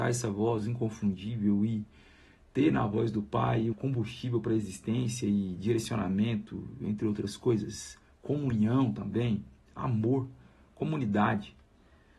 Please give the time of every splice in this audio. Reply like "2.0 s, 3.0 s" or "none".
3.7 s